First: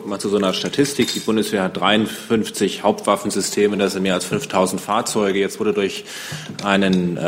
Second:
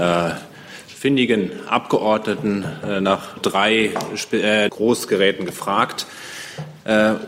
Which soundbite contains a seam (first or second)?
second